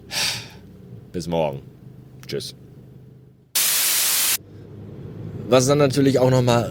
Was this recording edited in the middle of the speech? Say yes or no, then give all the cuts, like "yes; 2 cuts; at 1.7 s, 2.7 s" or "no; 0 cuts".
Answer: no; 0 cuts